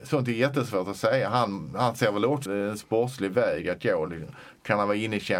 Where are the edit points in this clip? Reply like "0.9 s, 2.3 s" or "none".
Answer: 2.5 s